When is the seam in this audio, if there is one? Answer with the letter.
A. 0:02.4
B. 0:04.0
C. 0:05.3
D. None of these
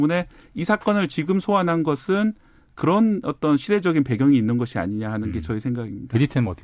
D